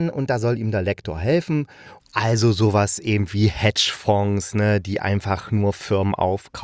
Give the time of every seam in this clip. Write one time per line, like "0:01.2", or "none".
0:02.0

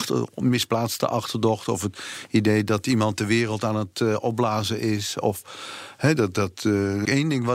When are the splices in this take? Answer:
none

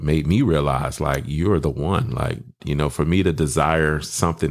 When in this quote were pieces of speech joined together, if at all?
0:02.6

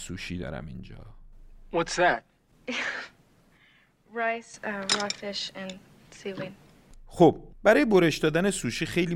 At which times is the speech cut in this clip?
0:02.5
0:07.5

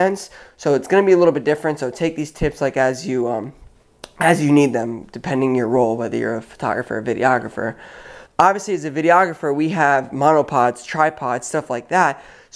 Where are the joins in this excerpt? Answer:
0:08.3

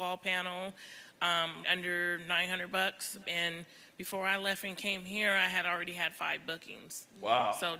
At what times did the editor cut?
0:01.6
0:03.2

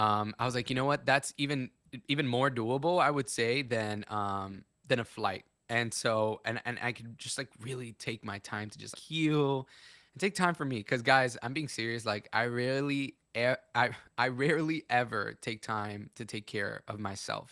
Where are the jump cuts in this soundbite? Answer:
0:08.9

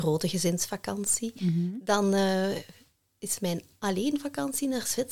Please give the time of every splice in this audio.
none

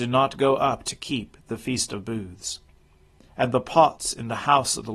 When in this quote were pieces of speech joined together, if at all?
0:03.3

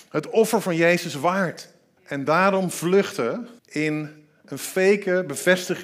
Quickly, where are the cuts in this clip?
0:02.0
0:03.6

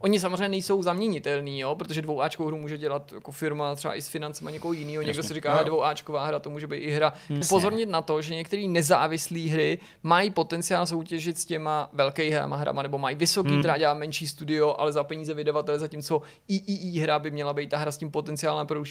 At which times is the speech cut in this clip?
0:07.4
0:13.6

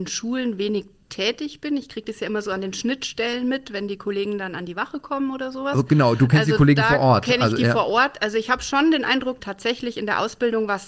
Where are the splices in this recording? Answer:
0:09.4

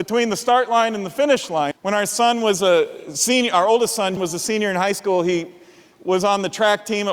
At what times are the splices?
0:01.7
0:04.2

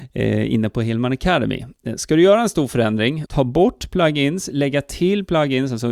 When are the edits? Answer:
0:03.3

